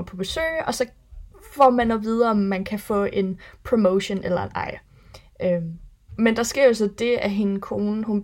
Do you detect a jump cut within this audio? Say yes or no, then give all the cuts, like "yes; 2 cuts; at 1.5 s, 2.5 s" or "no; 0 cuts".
no; 0 cuts